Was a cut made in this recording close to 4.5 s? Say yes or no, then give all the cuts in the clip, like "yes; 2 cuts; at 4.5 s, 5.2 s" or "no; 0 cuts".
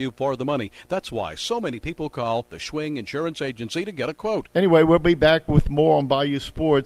yes; 1 cut; at 4.5 s